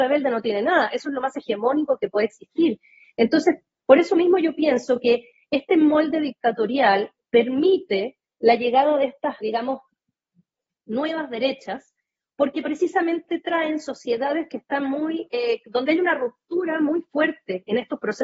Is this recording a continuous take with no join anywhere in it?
no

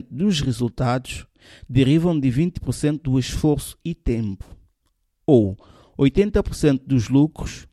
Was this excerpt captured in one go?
yes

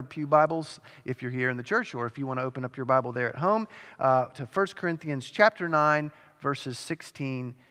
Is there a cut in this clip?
no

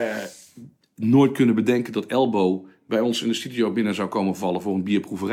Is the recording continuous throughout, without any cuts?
yes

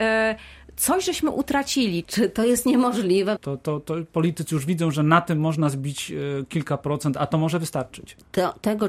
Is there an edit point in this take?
yes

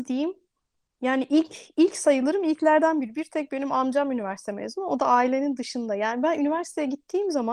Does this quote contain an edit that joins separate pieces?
no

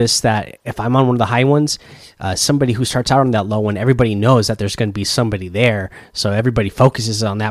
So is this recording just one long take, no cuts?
yes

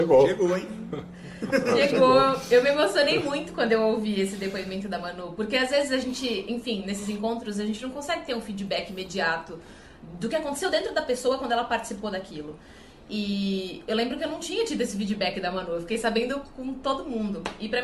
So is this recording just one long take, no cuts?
yes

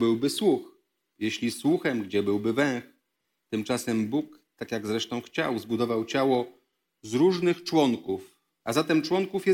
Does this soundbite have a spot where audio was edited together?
yes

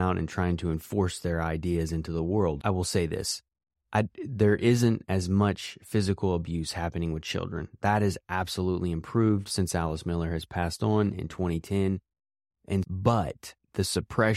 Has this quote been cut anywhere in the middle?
yes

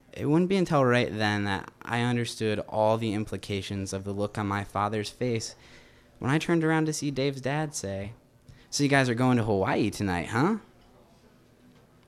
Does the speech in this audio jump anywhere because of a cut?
no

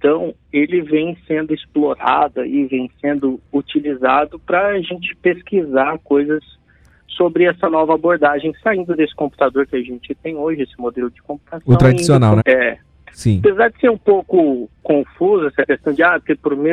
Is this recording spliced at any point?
yes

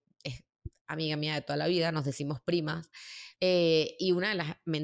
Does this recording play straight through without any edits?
no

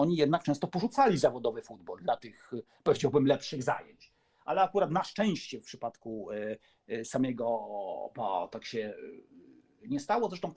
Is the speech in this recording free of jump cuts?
yes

